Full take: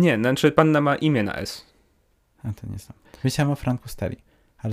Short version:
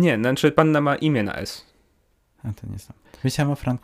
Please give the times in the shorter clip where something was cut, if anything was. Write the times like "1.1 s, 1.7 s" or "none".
none

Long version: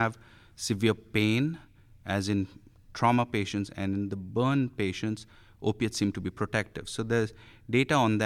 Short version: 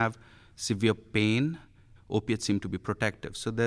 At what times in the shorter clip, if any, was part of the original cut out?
2.0 s

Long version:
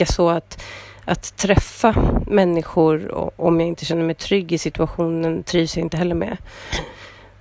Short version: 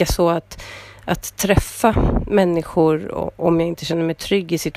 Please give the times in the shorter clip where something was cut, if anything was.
none

